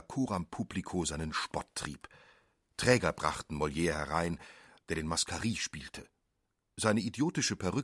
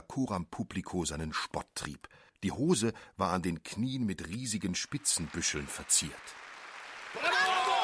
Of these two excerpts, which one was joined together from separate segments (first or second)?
second